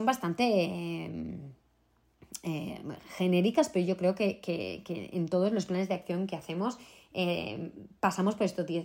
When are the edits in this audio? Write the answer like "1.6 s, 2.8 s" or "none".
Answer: none